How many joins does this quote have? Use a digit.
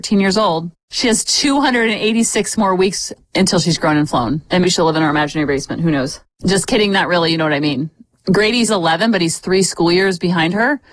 1